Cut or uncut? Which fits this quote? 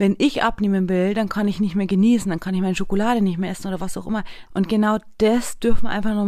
cut